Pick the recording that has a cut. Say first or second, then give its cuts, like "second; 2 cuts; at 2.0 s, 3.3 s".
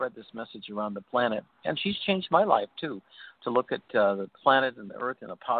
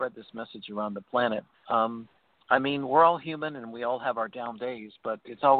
second; 1 cut; at 1.5 s